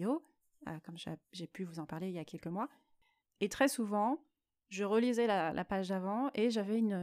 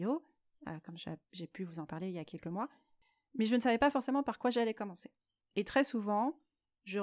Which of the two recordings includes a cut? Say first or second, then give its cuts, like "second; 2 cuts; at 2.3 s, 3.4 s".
first; 1 cut; at 3.2 s